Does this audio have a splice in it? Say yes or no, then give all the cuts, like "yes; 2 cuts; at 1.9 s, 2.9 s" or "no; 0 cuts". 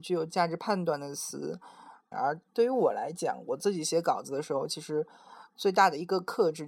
yes; 1 cut; at 2.1 s